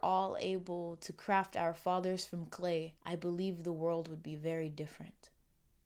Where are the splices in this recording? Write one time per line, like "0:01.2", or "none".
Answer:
0:03.0